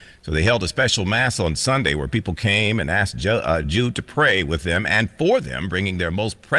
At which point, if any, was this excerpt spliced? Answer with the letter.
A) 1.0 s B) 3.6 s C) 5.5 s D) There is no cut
D